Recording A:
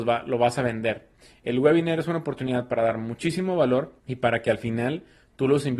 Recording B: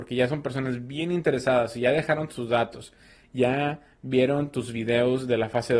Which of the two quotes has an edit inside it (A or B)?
A